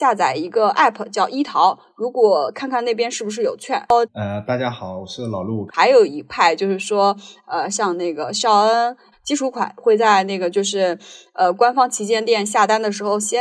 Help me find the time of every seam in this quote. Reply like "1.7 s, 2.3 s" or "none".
4.0 s, 5.7 s, 9.1 s